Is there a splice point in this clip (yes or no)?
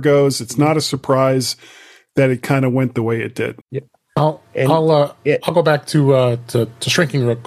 yes